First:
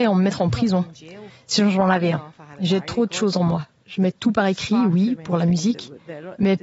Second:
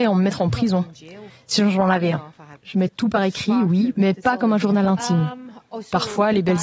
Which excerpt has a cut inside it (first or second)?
second